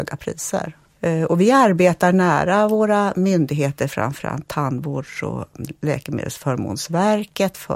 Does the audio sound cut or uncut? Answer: uncut